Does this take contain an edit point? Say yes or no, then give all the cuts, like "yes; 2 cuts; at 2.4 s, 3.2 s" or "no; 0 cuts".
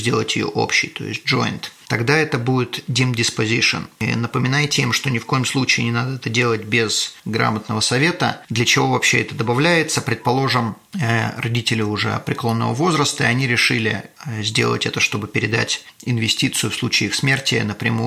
no; 0 cuts